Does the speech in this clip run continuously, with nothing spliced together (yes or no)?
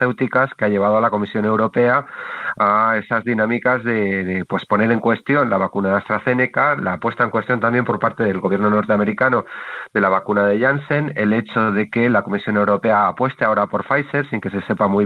yes